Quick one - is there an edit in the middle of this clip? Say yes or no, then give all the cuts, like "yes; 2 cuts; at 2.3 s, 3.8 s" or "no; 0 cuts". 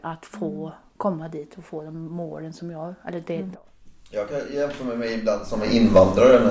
yes; 1 cut; at 3.5 s